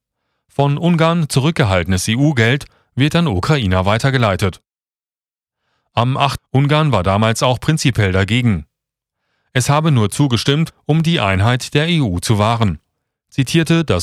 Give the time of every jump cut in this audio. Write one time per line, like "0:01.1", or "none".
0:06.4

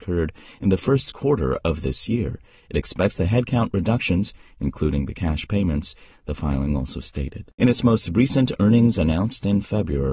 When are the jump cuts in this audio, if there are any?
0:06.1
0:07.6

